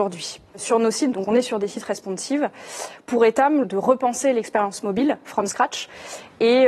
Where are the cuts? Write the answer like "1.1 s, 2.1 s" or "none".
1.1 s, 3.6 s